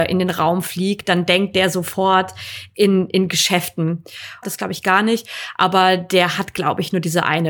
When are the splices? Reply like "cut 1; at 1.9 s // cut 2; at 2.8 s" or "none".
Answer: cut 1; at 4.4 s